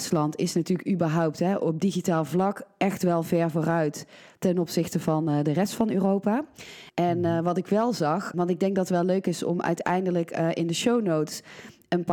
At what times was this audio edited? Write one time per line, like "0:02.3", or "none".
0:06.9
0:08.3